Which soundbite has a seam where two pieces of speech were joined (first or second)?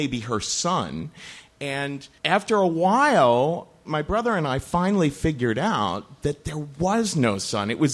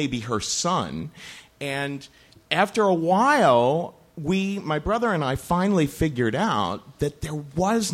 first